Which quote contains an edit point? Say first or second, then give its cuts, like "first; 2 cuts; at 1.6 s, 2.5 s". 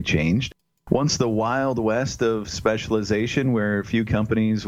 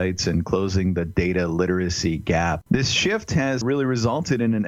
second; 1 cut; at 2.7 s